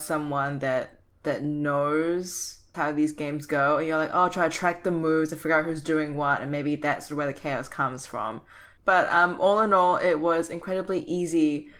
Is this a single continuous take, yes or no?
no